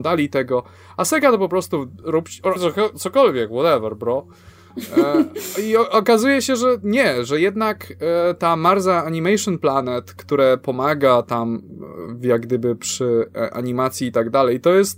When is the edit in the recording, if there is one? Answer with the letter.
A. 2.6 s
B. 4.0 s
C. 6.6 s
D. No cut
A